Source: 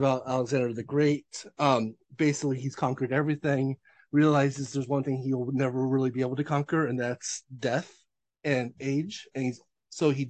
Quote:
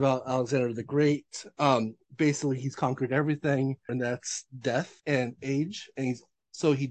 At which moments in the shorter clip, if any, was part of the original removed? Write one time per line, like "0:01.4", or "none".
0:03.9
0:05.0